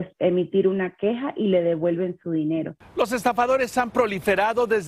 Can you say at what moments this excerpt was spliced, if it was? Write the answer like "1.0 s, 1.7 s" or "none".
none